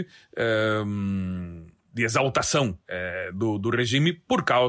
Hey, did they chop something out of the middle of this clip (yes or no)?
no